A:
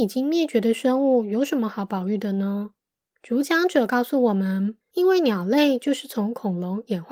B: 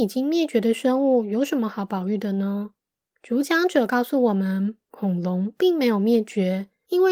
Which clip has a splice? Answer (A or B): A